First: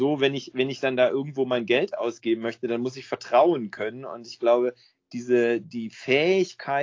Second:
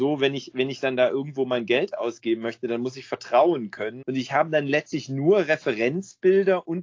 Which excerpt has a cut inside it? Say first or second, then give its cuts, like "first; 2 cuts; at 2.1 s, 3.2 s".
second; 1 cut; at 4.0 s